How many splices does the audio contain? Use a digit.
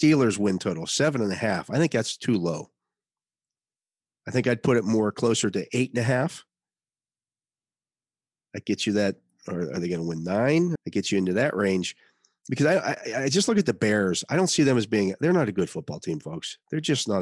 1